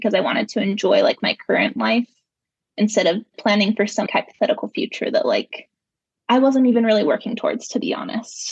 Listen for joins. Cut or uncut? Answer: cut